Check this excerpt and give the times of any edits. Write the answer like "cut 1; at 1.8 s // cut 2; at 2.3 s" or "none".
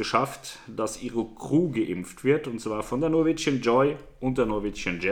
none